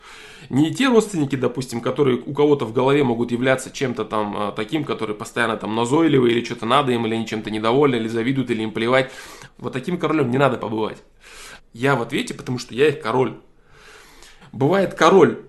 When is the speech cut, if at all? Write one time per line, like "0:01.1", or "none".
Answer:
0:09.5
0:11.6
0:14.4